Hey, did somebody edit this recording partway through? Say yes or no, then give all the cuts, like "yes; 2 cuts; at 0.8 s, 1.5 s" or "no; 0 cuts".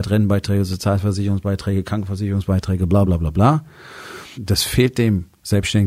yes; 2 cuts; at 3.0 s, 4.3 s